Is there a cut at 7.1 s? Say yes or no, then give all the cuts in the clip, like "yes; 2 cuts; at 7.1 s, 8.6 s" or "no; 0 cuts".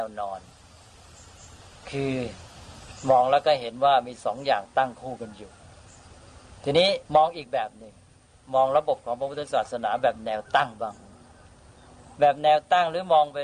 yes; 1 cut; at 7.1 s